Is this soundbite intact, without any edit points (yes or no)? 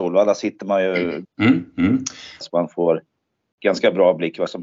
no